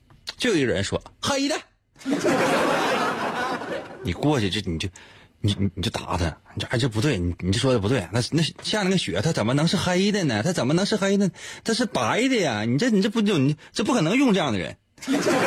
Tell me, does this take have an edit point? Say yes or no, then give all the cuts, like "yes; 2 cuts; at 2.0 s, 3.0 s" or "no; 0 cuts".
no; 0 cuts